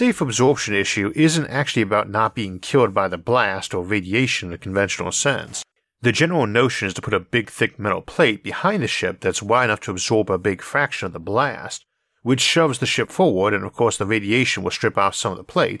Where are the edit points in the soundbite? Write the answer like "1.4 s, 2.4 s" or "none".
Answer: none